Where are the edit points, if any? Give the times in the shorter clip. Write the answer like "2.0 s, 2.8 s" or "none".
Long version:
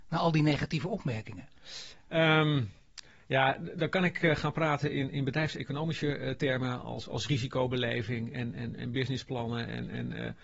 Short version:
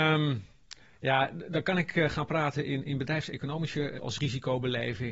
4.0 s